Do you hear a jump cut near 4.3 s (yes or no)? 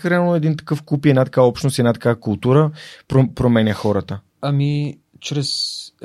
yes